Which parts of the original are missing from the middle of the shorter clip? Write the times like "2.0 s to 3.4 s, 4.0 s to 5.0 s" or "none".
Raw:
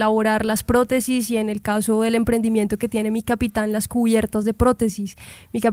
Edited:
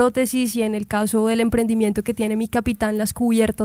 none